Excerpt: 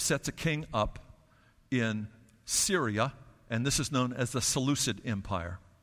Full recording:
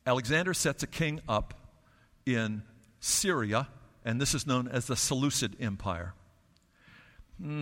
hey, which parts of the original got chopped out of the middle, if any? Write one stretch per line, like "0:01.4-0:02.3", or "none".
none